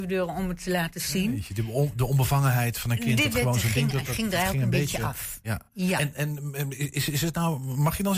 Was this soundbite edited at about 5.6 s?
no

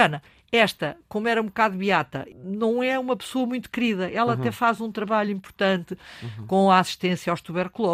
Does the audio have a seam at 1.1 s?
no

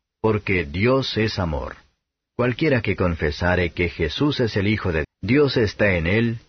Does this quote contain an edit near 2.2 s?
yes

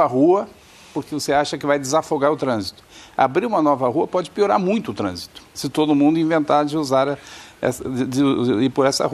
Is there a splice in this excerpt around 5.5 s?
yes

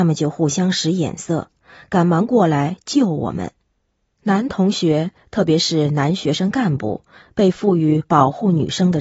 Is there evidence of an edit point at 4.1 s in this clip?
yes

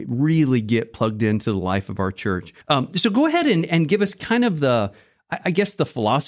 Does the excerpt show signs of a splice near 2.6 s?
yes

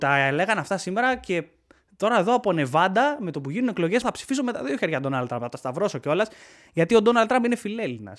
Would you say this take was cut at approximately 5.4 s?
no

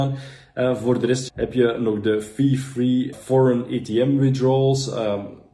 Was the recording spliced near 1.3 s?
yes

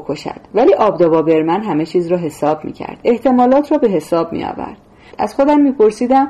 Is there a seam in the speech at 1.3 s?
no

